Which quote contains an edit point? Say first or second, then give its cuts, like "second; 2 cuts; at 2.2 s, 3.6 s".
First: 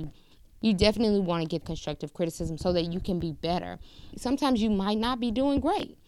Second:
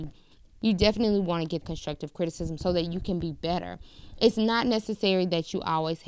first; 1 cut; at 4.1 s